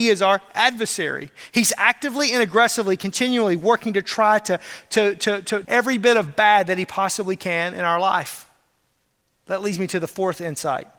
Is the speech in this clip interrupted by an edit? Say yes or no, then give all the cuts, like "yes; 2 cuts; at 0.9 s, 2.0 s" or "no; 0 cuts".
yes; 1 cut; at 5.6 s